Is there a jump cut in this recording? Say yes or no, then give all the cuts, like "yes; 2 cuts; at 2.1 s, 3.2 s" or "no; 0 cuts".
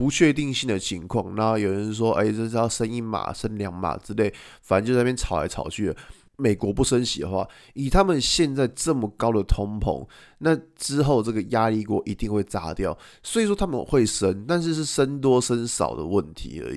yes; 1 cut; at 6.3 s